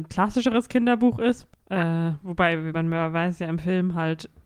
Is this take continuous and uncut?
no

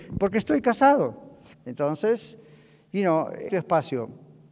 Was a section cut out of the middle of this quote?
yes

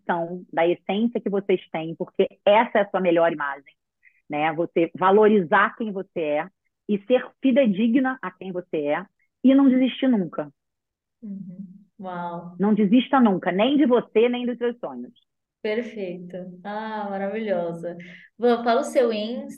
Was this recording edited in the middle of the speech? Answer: no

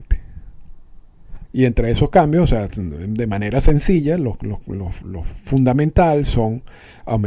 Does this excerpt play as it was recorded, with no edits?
no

